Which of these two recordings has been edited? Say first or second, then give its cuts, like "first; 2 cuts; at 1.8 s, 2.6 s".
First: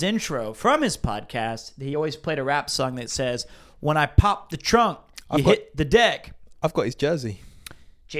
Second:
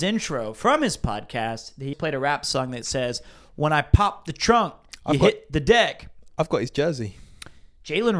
second; 1 cut; at 1.9 s